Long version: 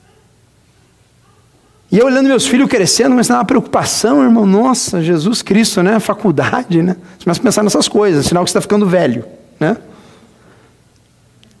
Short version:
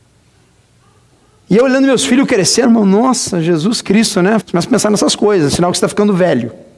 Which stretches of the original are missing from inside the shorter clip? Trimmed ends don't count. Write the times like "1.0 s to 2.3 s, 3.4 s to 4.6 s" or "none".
3.1 s to 4.3 s, 6.0 s to 7.1 s